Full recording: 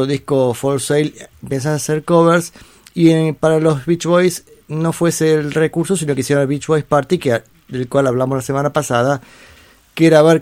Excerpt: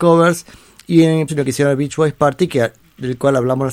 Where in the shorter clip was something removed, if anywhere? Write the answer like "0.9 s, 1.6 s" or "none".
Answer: 1.3 s